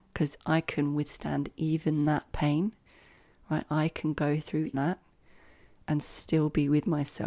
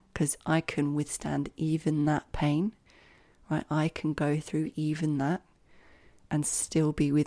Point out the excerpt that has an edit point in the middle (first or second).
first